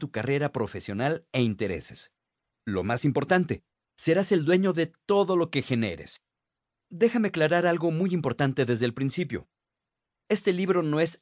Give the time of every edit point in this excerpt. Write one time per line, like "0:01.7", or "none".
0:06.7

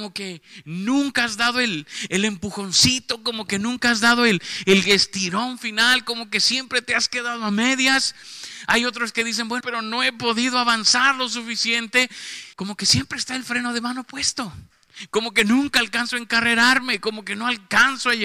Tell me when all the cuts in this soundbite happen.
0:09.6
0:12.5

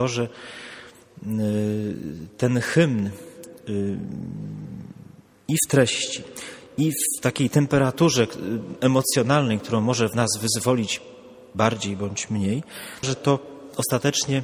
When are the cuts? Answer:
0:13.0

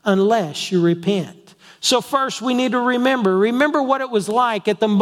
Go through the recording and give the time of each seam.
none

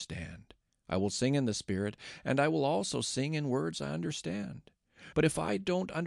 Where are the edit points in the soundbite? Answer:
0:05.1

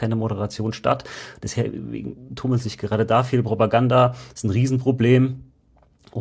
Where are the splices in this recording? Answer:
none

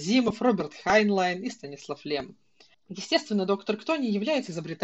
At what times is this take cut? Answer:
0:02.7

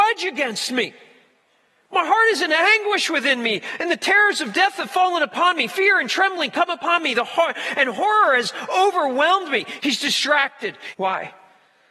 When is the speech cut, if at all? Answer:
0:09.8
0:10.9

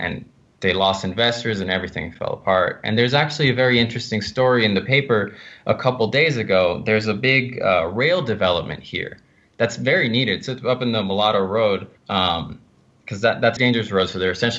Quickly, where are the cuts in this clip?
0:12.0
0:13.6

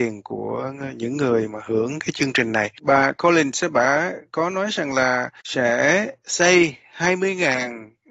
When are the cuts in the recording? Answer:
none

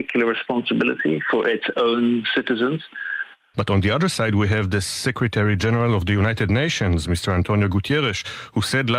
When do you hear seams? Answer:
0:03.5

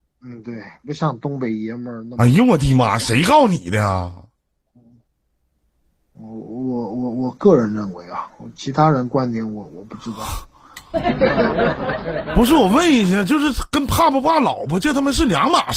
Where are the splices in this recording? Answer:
none

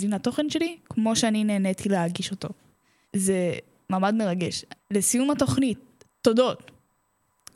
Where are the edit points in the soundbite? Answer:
0:03.0
0:04.8

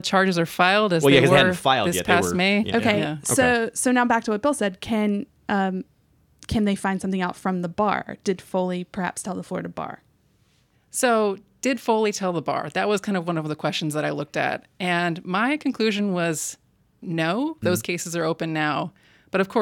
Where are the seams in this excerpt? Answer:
0:02.6
0:17.6

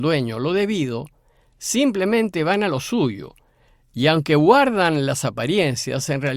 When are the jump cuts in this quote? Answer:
none

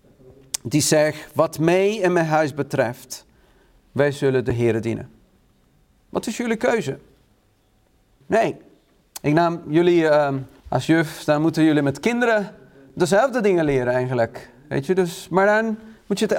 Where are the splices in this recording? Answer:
0:08.2
0:10.6

